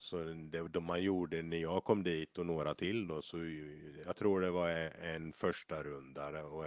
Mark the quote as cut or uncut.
uncut